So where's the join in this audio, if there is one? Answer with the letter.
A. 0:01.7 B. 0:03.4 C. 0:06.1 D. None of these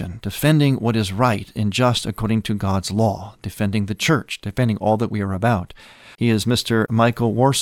C